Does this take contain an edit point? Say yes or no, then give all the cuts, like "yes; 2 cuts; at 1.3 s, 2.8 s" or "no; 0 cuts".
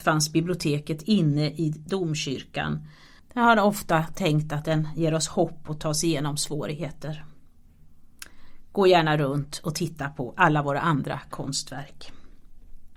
yes; 1 cut; at 3.2 s